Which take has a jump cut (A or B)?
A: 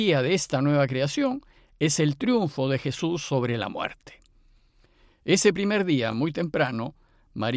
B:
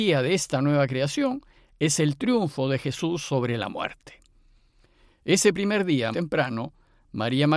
B